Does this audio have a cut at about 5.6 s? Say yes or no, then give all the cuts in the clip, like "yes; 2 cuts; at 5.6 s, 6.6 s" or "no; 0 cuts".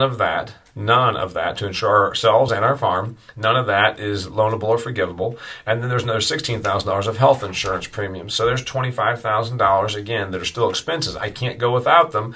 no; 1 cut; at 2.5 s